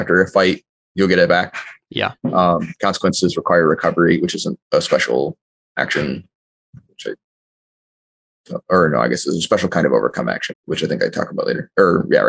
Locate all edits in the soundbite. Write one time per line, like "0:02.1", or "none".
0:10.5